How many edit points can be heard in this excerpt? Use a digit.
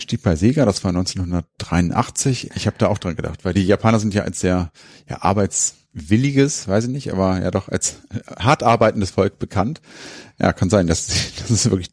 1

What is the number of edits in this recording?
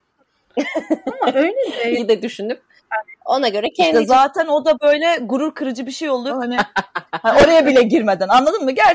2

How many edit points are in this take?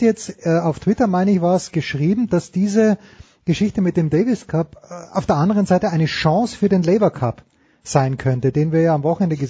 0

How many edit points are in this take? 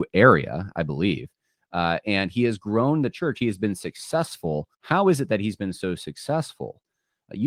1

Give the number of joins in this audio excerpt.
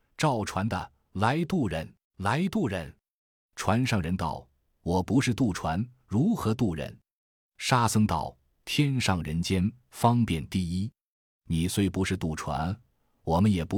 1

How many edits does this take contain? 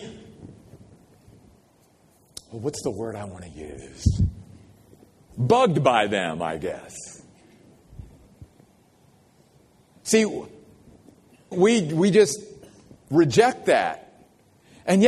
1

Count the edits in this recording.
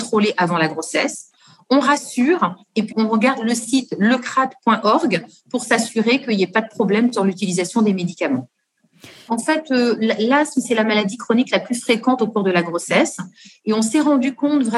2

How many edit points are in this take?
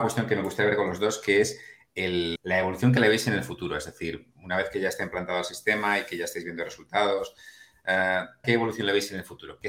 2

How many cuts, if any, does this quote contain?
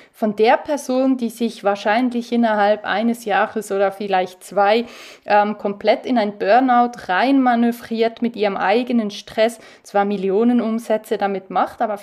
0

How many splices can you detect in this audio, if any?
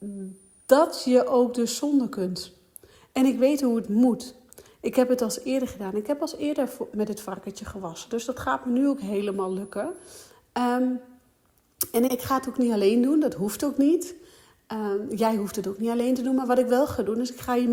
1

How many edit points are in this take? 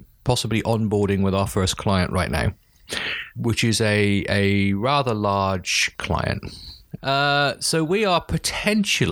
2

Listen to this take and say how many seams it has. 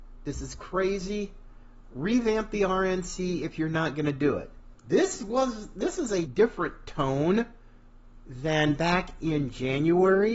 2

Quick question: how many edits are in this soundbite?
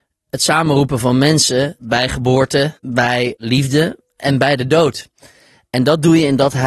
0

